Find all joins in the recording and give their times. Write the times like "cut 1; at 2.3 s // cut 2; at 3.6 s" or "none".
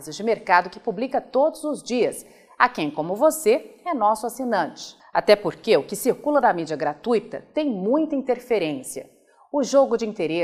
cut 1; at 5.0 s